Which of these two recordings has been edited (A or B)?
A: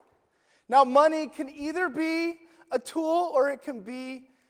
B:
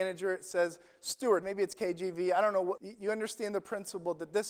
B